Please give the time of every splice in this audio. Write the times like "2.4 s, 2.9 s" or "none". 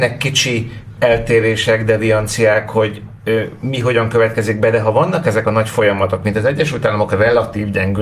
1.0 s